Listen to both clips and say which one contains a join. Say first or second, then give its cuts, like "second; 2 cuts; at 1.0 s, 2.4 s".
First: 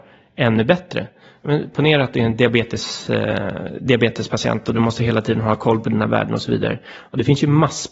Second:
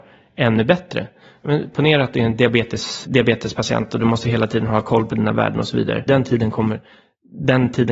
second; 2 cuts; at 3.0 s, 6.1 s